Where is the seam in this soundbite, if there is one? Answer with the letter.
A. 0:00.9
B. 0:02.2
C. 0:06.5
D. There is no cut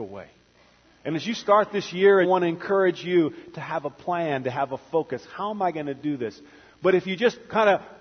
B